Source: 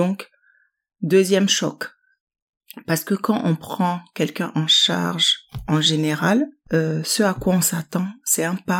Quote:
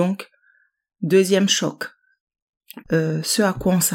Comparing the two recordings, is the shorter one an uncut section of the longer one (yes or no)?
no